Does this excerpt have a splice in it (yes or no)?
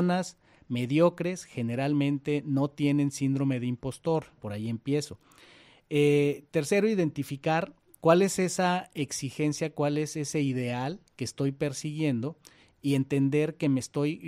yes